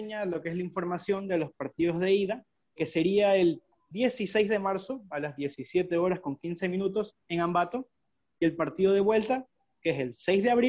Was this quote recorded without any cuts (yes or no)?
no